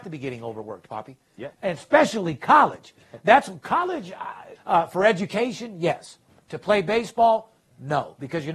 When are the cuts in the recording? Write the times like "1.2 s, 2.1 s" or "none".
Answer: 1.5 s, 4.6 s